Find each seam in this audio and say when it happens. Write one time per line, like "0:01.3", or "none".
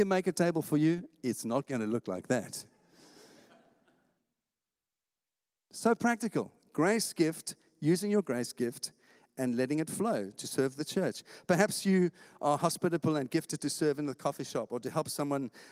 none

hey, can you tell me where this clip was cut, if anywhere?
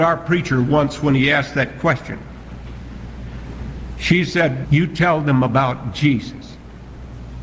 0:04.6

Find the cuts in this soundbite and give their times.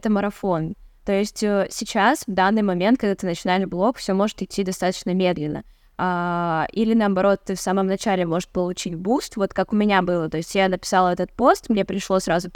none

